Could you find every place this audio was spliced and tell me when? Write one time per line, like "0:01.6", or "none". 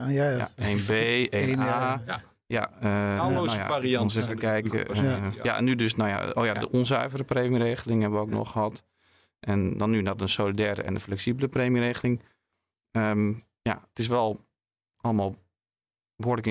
none